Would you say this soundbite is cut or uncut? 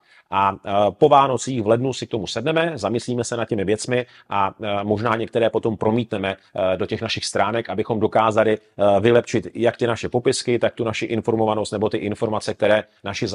uncut